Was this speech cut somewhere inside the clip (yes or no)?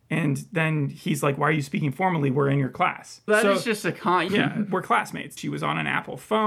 yes